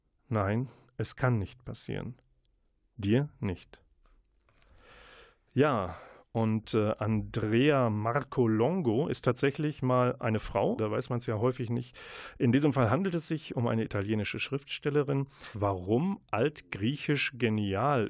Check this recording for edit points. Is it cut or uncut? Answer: cut